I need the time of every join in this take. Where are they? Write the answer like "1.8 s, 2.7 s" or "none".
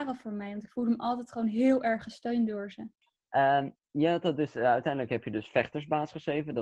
none